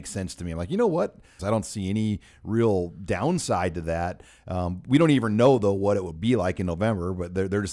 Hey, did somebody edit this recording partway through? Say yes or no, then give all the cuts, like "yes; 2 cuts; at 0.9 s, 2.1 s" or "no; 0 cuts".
yes; 1 cut; at 1.4 s